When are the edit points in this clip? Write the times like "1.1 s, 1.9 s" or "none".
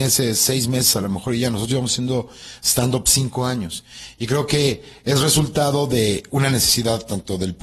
none